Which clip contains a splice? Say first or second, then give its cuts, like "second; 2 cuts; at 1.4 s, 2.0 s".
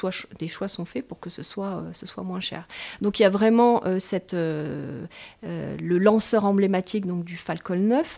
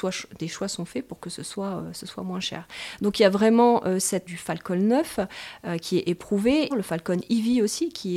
second; 2 cuts; at 4.3 s, 6.7 s